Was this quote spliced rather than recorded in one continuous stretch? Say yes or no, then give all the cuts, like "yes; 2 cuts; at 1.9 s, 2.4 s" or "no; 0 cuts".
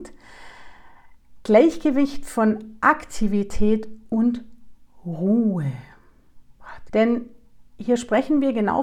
yes; 1 cut; at 6.9 s